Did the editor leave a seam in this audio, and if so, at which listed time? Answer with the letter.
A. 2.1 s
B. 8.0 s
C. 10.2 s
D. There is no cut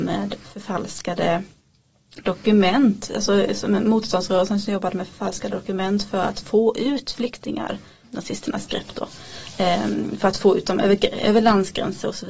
B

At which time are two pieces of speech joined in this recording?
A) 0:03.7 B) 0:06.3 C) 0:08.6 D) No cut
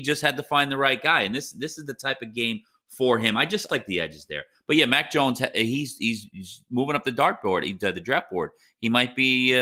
A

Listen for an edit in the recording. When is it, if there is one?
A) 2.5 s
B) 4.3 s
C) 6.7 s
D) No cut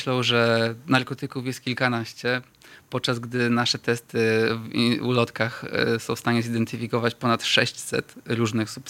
D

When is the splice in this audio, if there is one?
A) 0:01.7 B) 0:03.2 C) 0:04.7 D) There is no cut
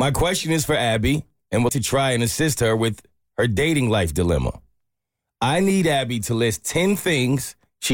A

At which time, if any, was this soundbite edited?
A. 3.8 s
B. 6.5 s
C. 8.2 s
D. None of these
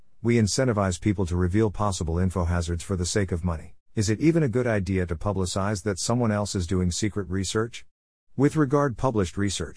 A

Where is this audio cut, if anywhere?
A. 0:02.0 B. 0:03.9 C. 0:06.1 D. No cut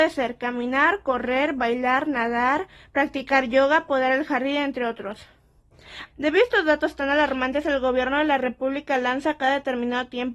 C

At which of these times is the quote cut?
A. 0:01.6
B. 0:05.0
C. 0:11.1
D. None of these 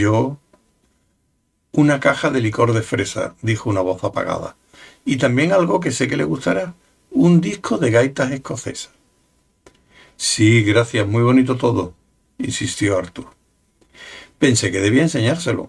D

